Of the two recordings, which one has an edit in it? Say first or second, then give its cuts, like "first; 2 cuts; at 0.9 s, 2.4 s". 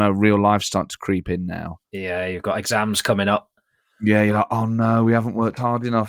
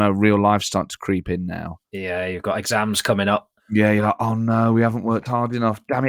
second; 1 cut; at 3.6 s